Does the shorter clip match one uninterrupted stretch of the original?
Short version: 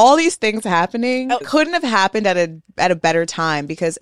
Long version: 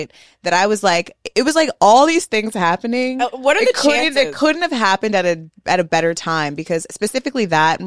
no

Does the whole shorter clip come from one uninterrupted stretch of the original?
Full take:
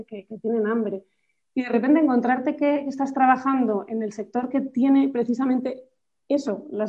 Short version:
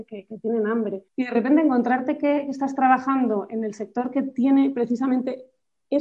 no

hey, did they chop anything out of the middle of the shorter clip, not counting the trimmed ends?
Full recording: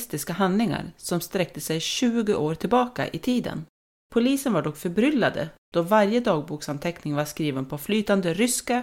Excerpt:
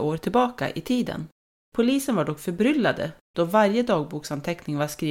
no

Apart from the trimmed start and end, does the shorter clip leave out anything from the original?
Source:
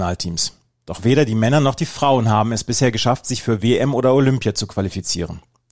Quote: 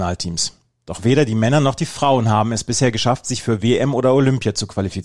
no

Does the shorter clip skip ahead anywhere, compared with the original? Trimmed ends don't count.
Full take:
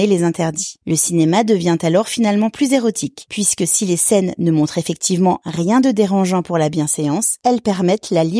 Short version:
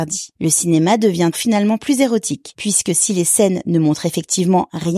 yes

